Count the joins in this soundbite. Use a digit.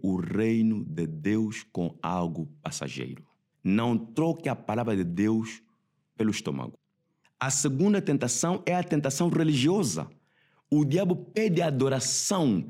1